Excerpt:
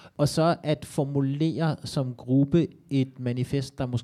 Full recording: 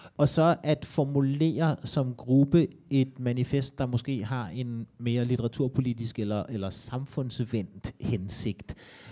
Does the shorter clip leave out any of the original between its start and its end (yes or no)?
no